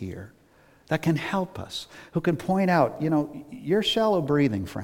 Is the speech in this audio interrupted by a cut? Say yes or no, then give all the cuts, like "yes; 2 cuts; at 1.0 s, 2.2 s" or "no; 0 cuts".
no; 0 cuts